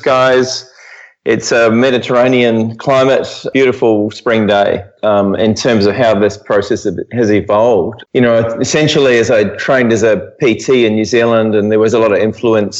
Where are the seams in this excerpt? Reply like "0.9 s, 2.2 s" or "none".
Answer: 5.0 s